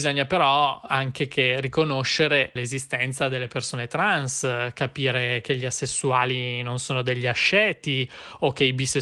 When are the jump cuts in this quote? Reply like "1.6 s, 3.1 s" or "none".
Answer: 2.6 s